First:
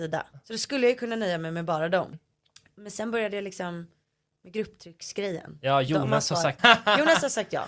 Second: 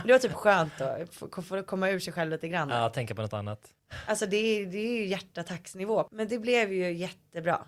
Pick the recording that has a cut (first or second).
first